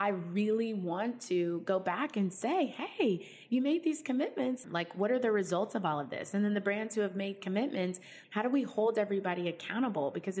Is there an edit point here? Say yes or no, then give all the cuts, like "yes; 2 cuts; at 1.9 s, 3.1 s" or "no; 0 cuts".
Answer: yes; 2 cuts; at 4.6 s, 8.2 s